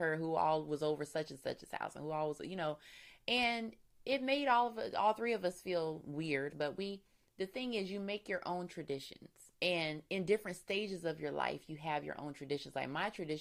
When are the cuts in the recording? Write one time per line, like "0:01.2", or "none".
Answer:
0:06.5
0:09.5